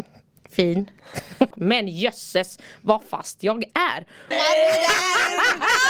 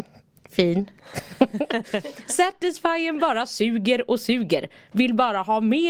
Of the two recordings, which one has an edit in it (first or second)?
first